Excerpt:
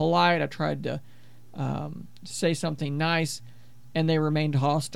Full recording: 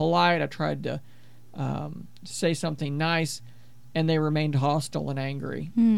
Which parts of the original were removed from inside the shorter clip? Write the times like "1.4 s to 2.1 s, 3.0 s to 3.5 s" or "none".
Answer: none